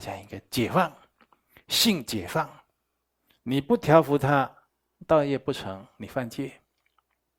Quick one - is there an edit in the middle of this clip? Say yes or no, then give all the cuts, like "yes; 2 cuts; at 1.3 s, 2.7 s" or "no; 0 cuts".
yes; 1 cut; at 3.3 s